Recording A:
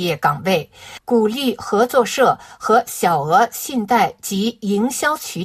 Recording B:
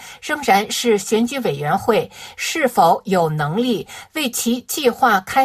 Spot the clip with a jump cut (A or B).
A